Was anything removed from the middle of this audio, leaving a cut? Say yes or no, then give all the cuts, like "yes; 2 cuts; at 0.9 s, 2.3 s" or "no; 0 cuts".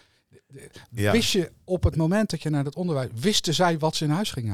no; 0 cuts